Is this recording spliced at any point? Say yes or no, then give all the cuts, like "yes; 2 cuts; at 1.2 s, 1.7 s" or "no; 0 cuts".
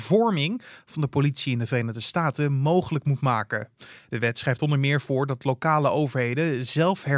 no; 0 cuts